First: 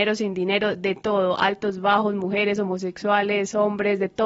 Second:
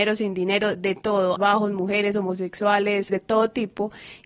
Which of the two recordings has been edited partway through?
second; 2 cuts; at 1.4 s, 3.1 s

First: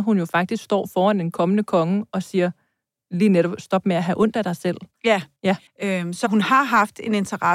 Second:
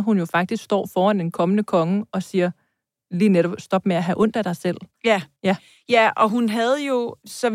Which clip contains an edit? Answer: first; 1 cut; at 5.7 s

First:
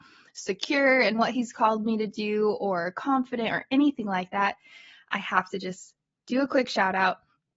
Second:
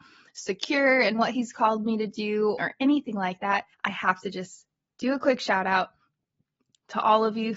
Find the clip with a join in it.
second; 2 cuts; at 2.6 s, 3.7 s

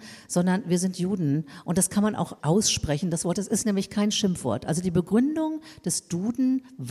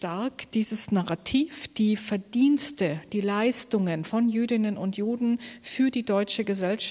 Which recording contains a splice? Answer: first; 1 cut; at 2.4 s

